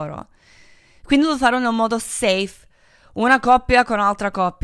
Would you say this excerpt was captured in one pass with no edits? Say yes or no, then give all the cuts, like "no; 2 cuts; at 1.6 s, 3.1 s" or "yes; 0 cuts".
yes; 0 cuts